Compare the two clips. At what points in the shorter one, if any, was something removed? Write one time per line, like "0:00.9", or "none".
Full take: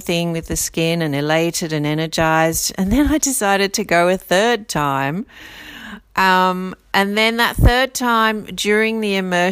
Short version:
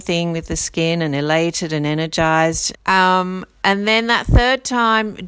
0:02.7